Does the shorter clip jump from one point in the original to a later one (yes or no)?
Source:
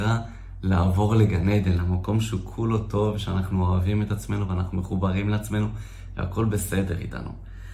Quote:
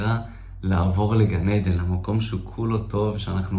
no